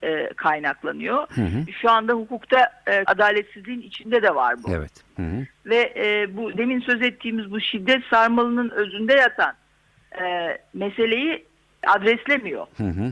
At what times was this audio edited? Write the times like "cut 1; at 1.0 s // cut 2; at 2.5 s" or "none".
cut 1; at 3.1 s // cut 2; at 5.2 s

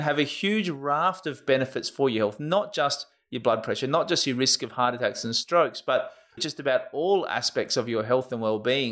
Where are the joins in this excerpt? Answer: cut 1; at 6.4 s

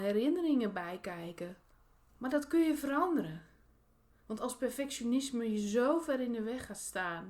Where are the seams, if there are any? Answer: cut 1; at 2.1 s

